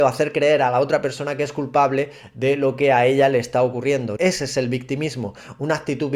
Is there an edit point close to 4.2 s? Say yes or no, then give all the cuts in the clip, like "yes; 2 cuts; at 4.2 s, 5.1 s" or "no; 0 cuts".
yes; 1 cut; at 4.2 s